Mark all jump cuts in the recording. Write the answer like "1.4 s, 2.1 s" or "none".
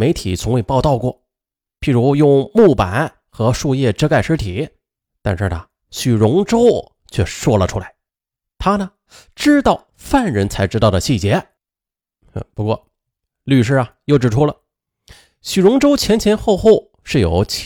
none